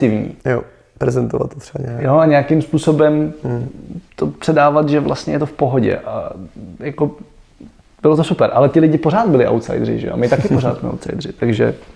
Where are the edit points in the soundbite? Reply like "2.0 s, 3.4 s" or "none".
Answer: none